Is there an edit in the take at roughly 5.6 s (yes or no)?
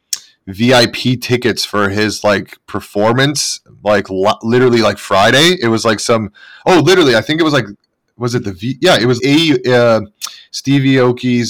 no